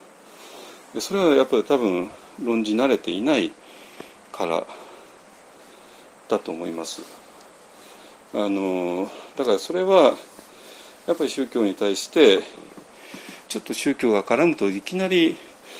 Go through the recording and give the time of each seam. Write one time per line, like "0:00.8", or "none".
0:08.3
0:13.5